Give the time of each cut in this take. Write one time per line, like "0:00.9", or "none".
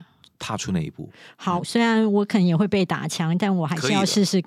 0:01.6